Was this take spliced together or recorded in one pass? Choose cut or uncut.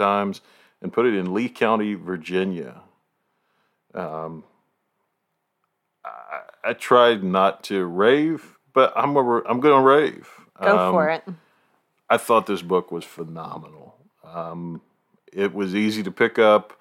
uncut